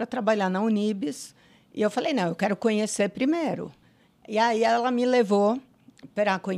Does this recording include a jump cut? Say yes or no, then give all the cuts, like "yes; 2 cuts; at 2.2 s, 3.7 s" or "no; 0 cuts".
no; 0 cuts